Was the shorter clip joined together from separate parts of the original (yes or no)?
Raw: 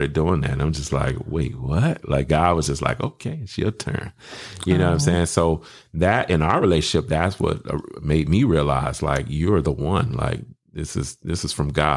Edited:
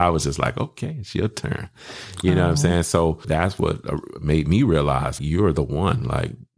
yes